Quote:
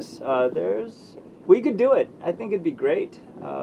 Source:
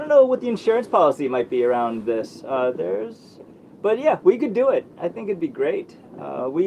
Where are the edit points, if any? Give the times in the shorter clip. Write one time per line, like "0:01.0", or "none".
0:01.4

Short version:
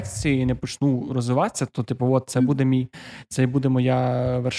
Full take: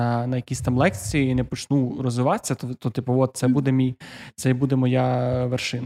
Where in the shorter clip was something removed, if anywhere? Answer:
0:01.7

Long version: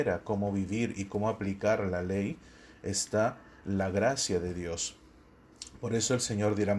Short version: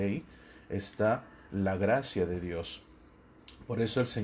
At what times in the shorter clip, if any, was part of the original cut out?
none

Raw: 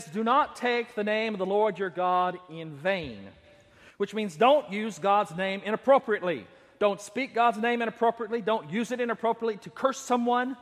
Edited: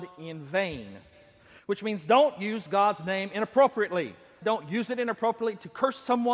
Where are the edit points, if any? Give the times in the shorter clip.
0:04.4

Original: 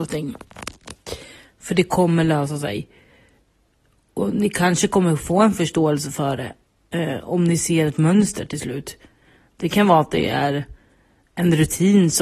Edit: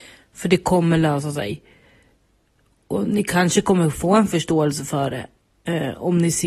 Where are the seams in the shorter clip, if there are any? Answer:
none

